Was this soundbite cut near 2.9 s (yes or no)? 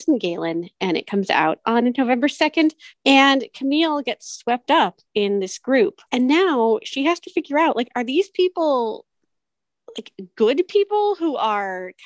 yes